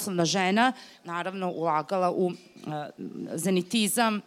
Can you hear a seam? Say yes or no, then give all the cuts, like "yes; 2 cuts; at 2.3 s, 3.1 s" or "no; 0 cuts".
yes; 1 cut; at 1.0 s